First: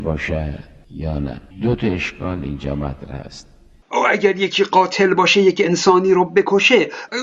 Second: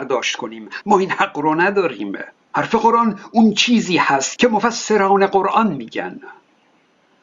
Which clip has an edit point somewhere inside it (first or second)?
first